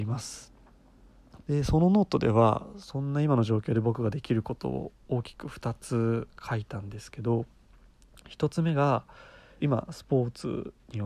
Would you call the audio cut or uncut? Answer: cut